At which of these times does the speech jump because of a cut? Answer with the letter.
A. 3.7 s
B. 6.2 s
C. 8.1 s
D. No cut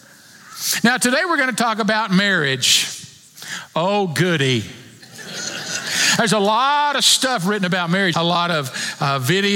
C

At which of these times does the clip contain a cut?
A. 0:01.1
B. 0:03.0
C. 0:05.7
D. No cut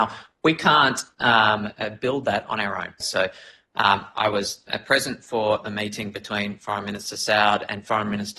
B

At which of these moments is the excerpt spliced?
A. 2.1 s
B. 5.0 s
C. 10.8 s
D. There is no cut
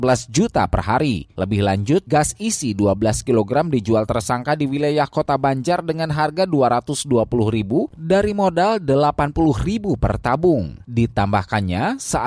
A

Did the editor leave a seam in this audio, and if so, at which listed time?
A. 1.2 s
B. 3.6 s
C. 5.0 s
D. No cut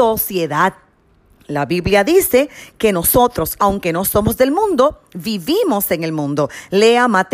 B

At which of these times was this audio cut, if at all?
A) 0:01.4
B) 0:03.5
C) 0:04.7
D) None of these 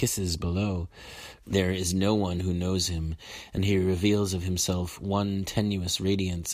A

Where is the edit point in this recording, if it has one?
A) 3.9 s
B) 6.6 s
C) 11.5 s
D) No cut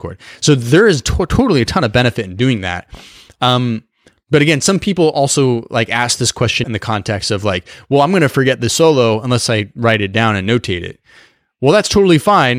B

